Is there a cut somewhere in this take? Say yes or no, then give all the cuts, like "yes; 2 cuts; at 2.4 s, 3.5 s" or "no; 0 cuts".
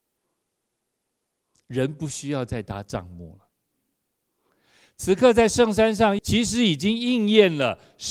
yes; 1 cut; at 6.2 s